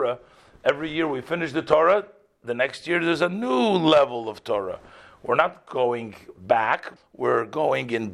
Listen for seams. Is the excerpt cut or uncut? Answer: cut